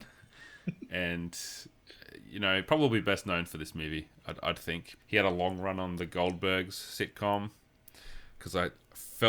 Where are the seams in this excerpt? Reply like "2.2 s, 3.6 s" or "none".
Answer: 5.0 s, 8.4 s